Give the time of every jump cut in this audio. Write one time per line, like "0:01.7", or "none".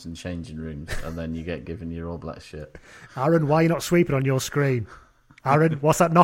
0:03.1